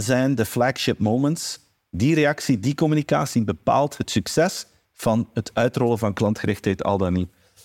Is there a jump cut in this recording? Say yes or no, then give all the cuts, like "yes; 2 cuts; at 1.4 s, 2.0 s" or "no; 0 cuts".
no; 0 cuts